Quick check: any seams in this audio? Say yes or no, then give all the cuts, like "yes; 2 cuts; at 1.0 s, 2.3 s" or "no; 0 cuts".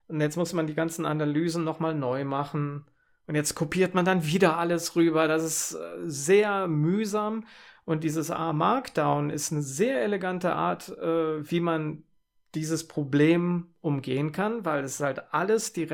no; 0 cuts